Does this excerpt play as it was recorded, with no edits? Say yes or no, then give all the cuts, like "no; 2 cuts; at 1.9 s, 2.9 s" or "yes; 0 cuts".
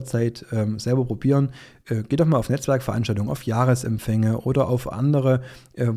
yes; 0 cuts